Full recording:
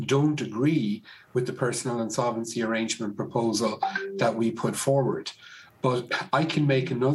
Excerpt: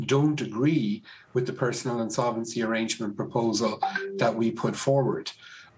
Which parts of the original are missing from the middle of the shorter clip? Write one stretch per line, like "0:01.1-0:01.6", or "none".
none

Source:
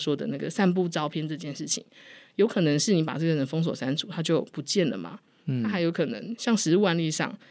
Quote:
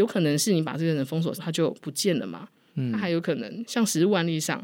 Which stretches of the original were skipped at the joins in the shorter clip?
0:03.8-0:04.1

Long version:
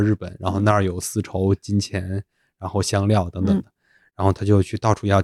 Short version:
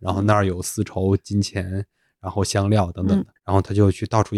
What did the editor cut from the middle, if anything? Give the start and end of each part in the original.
0:03.7-0:04.1

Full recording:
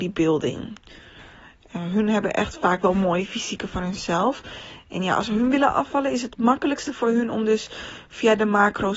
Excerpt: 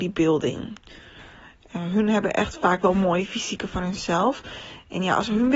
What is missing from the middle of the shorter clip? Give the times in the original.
none

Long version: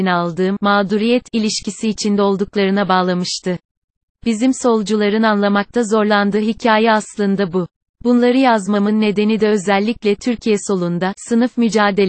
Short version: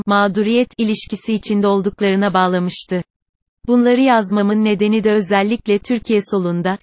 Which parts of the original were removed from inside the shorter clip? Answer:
0:04.1-0:07.9

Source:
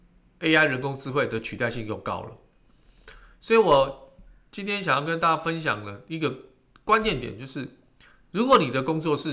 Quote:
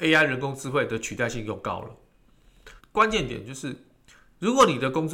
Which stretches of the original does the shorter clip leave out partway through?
0:03.2-0:06.7

